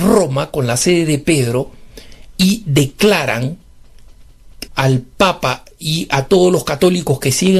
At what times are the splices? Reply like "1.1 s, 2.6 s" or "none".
4.7 s